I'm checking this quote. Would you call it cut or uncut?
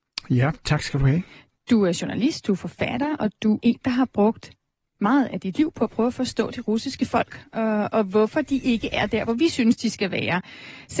cut